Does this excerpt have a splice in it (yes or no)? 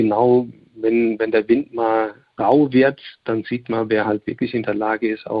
no